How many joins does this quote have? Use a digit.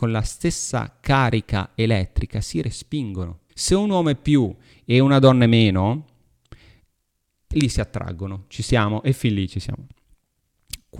1